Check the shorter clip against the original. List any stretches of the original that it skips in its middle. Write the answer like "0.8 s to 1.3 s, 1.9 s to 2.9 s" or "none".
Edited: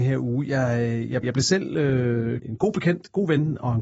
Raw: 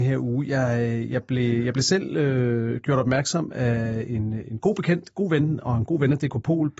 1.2 s to 1.6 s, 2.8 s to 4.4 s